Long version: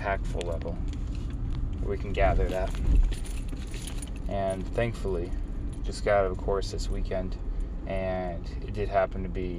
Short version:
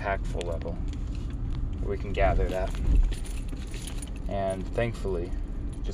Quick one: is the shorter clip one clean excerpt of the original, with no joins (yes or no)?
yes